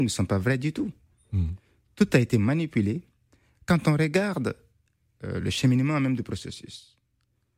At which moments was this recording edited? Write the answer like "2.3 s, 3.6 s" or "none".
none